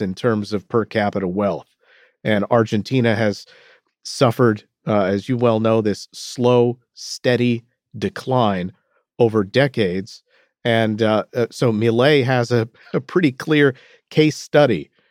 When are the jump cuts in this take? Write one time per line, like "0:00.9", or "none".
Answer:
none